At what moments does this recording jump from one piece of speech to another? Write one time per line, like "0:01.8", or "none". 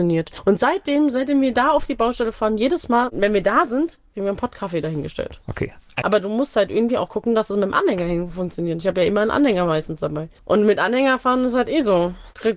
0:06.0